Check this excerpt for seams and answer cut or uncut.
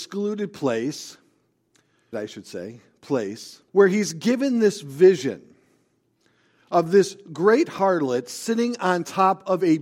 cut